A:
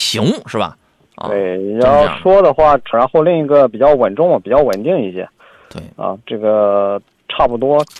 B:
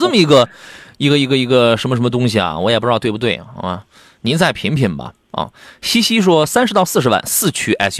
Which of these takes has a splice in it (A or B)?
A